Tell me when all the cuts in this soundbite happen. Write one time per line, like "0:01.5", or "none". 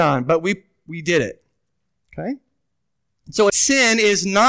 0:03.5